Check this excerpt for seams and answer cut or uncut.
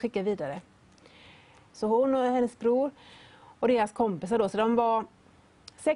cut